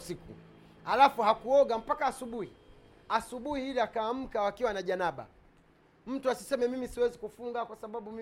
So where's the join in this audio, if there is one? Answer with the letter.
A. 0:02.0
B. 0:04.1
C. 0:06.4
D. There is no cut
D